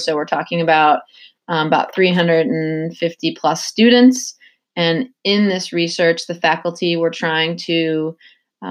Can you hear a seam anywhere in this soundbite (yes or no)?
no